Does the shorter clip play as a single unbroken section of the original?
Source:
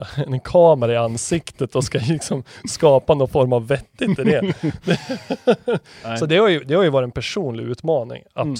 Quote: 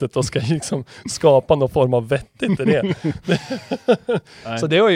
yes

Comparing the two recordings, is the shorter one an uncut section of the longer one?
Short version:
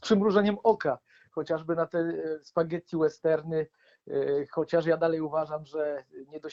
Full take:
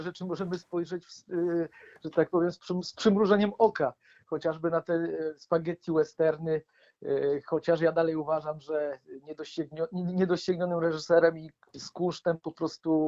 yes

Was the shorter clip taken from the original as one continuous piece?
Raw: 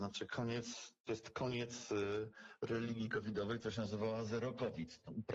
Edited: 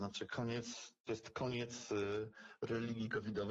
yes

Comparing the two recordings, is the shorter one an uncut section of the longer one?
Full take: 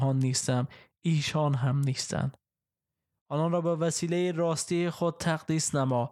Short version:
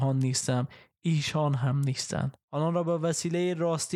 no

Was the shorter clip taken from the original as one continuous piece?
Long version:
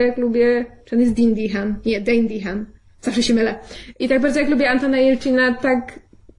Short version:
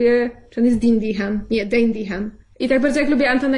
no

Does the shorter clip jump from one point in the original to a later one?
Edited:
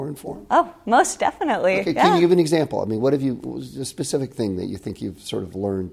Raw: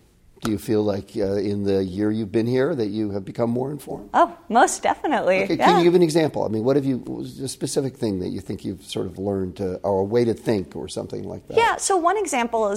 no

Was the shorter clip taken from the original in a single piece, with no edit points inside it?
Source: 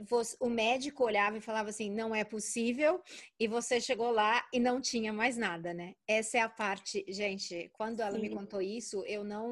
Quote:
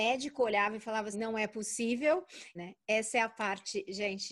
no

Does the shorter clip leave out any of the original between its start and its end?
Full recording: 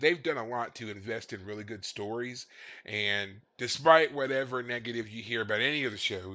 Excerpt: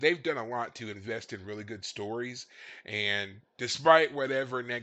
no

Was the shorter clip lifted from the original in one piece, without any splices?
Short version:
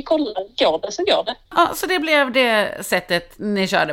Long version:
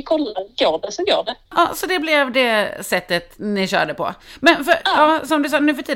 yes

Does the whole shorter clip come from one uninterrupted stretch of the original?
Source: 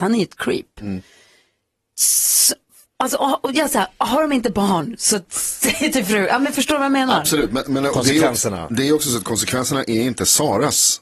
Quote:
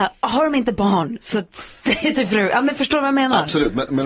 yes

